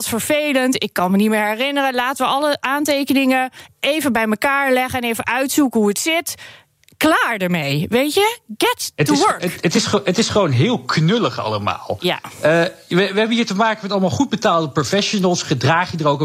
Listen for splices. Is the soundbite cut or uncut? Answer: uncut